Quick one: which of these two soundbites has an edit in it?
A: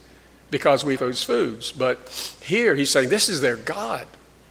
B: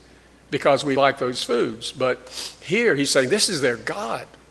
A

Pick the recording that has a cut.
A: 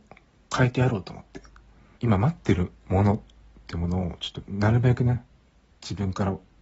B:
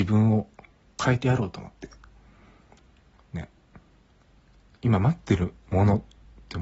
A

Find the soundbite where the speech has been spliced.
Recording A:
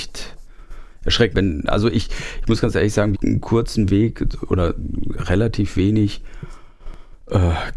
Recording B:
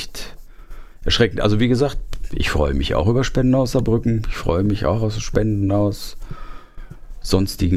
A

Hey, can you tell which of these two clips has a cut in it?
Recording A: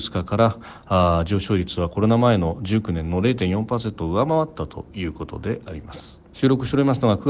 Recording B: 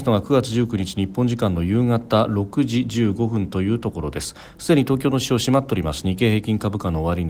A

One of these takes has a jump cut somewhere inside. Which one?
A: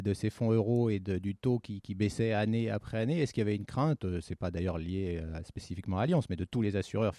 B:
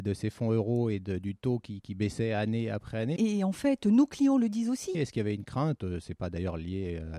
B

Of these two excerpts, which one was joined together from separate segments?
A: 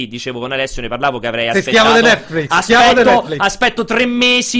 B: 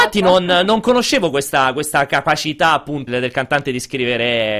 B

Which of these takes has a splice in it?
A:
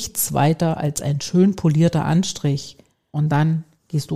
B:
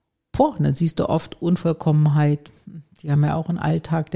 A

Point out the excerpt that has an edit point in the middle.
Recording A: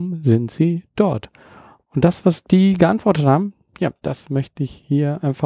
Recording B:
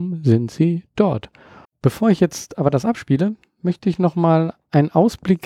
B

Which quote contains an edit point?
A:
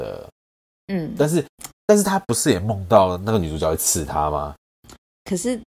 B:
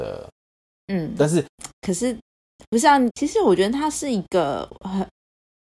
B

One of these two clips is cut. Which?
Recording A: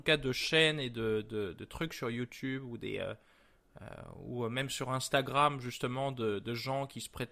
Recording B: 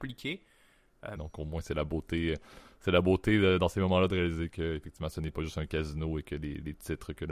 B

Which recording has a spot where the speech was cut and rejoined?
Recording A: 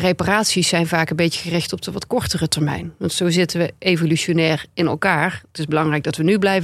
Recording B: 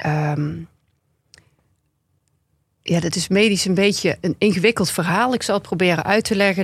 B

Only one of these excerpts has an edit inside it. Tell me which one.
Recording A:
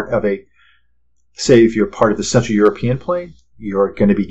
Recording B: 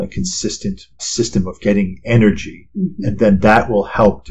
B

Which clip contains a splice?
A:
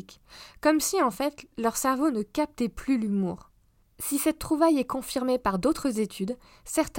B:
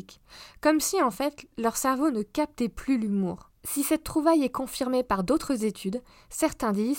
B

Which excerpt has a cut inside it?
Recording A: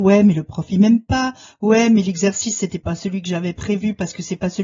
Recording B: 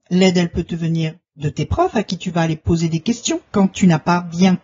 B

